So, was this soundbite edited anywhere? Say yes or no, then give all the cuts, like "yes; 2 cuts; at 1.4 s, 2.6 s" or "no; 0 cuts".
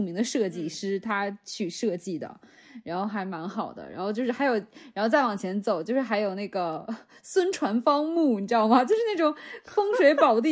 no; 0 cuts